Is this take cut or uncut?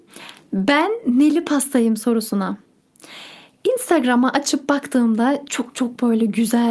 uncut